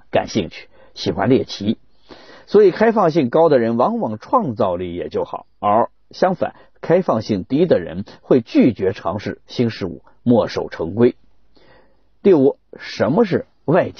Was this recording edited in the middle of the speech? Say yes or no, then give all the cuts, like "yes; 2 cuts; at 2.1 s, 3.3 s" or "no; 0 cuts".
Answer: no; 0 cuts